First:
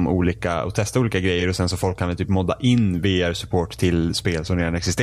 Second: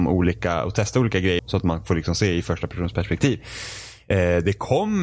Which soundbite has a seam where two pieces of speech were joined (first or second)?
second